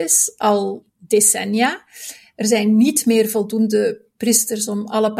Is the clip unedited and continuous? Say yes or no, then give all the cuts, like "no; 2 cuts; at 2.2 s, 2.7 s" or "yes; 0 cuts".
yes; 0 cuts